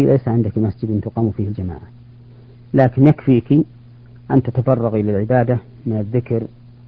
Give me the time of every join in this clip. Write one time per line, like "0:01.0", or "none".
none